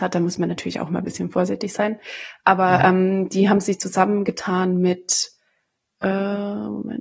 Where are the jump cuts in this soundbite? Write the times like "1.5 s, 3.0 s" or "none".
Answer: none